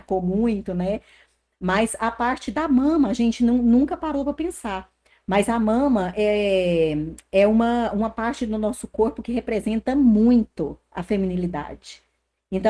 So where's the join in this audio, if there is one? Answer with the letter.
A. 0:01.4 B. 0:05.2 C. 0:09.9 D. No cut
D